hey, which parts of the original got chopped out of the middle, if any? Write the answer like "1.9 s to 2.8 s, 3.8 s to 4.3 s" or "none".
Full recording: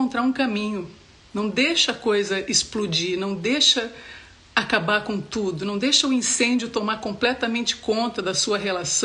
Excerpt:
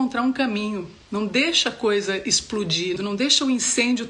1.0 s to 1.2 s, 3.2 s to 5.6 s